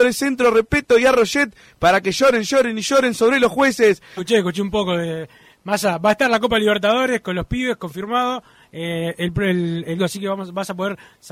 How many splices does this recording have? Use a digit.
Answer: 3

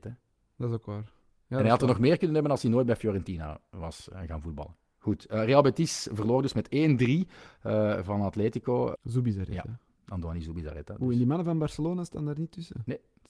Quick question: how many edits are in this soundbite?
2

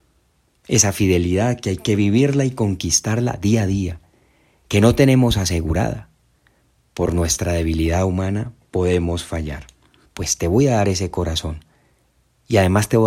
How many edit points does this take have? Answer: 1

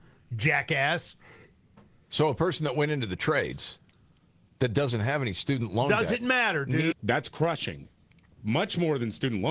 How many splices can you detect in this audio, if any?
1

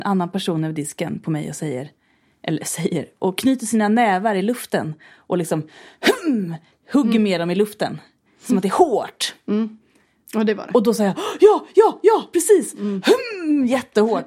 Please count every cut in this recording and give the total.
0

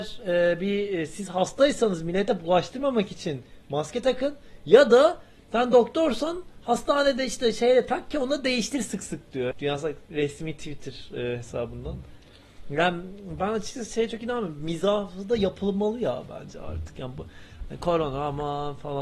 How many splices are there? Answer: 1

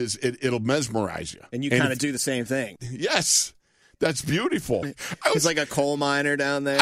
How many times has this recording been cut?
2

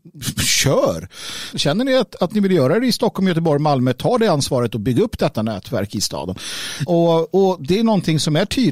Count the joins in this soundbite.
2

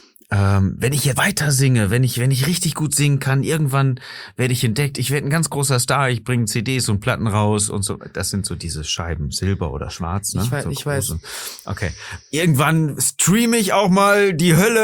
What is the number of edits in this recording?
1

